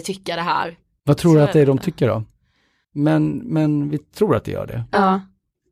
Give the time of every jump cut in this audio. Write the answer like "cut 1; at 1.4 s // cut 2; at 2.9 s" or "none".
cut 1; at 1.0 s // cut 2; at 2.8 s